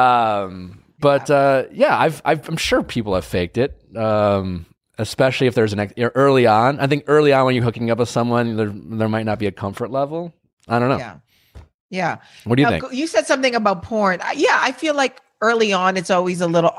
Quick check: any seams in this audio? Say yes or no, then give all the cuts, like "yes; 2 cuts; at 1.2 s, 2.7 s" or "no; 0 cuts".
no; 0 cuts